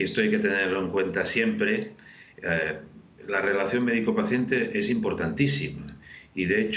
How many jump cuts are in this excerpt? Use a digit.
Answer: 1